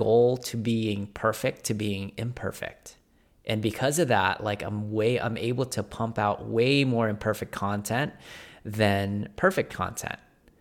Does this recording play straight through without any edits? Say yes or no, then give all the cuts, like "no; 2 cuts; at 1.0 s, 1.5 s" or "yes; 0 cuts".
yes; 0 cuts